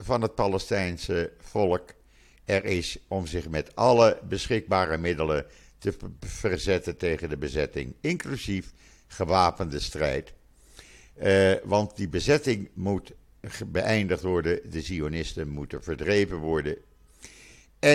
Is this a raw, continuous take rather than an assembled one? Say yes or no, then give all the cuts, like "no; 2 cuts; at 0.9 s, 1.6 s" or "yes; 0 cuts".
yes; 0 cuts